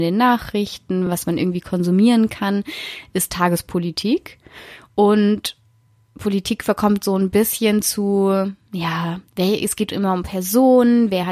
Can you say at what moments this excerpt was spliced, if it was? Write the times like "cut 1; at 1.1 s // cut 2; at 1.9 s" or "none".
none